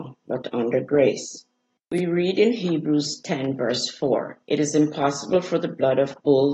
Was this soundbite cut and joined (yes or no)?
yes